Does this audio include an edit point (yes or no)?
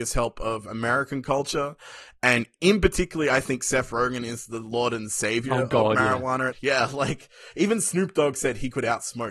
yes